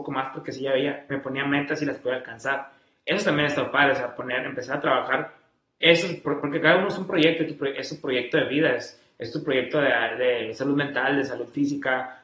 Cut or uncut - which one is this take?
uncut